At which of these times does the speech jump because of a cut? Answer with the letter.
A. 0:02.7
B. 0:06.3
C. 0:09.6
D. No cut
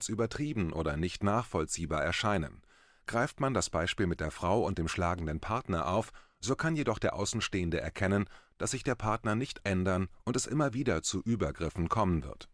C